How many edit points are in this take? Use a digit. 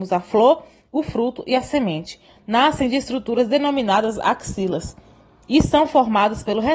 1